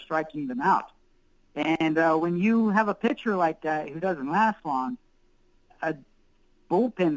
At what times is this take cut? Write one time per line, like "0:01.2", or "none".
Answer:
0:05.7